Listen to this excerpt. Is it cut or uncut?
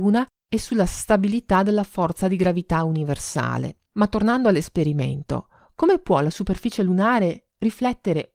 uncut